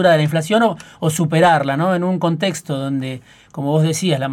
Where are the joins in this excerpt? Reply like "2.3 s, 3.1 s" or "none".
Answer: none